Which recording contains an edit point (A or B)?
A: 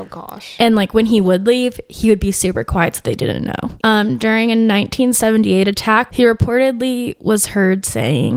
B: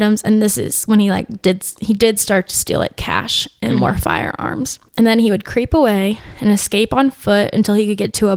A